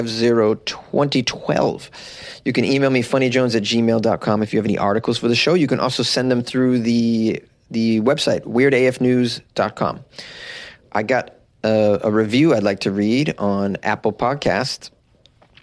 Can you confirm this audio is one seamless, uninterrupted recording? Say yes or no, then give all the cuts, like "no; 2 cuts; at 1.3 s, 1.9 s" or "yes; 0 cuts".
yes; 0 cuts